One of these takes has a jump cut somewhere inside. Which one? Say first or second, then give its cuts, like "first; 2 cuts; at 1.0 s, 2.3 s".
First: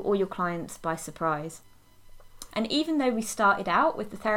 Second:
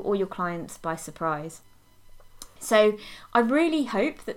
first; 1 cut; at 2.5 s